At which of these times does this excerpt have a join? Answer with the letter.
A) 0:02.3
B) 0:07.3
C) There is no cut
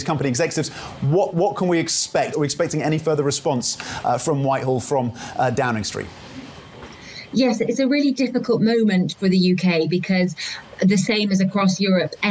A